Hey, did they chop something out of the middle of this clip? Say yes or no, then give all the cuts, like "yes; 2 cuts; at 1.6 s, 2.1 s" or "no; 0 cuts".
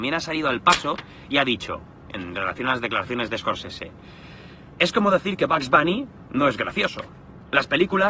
no; 0 cuts